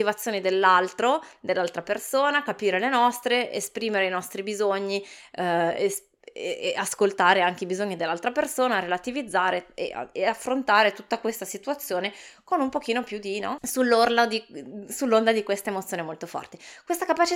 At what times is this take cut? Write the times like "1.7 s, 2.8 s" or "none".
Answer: 13.6 s